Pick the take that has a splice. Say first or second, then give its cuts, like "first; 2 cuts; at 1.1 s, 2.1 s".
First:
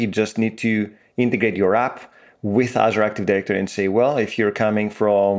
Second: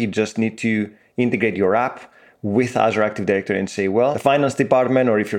second; 1 cut; at 4.1 s